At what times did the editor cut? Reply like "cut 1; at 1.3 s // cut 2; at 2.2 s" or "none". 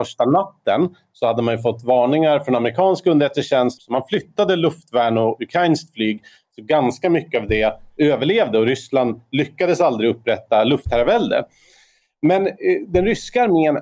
cut 1; at 3.8 s